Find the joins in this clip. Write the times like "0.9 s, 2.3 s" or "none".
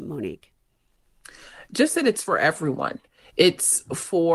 none